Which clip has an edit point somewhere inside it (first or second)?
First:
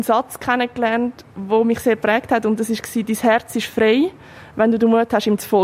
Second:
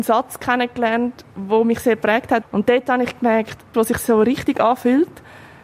second